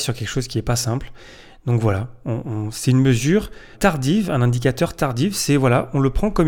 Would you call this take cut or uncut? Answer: cut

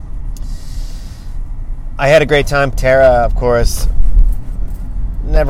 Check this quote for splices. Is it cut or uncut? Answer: cut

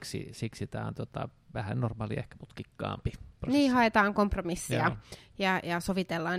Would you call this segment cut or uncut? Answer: uncut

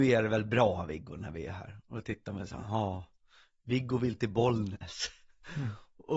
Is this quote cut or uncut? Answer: uncut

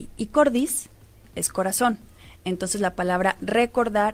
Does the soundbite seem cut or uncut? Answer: uncut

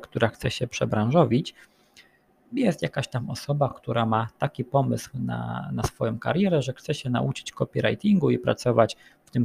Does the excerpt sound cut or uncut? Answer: uncut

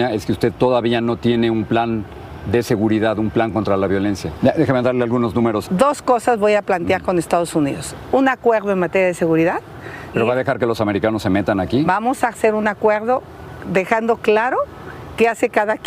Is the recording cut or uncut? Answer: cut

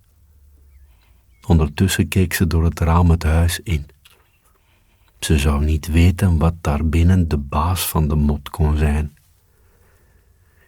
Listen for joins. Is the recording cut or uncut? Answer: uncut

